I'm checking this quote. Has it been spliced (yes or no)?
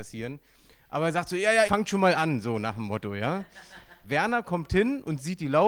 yes